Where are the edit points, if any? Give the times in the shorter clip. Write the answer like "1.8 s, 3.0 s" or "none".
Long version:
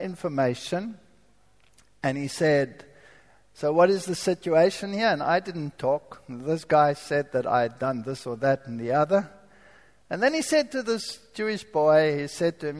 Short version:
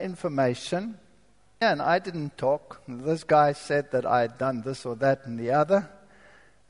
1.6 s